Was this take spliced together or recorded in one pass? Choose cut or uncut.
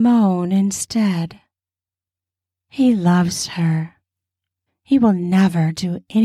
cut